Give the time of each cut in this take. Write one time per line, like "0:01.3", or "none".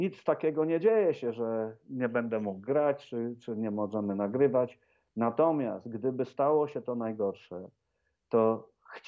none